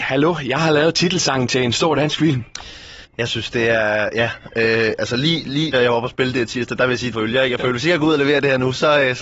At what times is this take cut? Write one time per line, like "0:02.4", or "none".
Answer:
0:05.7
0:07.1